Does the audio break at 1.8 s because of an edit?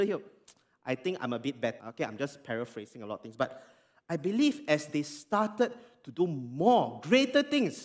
yes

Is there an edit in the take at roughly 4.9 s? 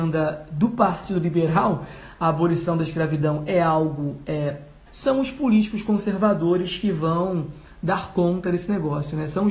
yes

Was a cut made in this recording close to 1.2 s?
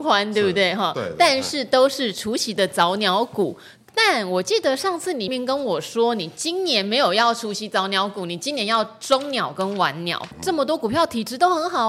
no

